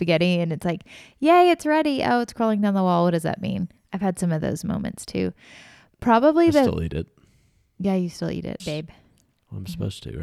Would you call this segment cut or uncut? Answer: cut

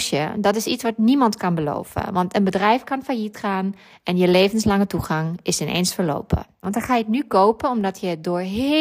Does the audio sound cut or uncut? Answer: cut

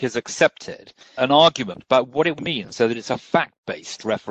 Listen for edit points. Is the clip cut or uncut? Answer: cut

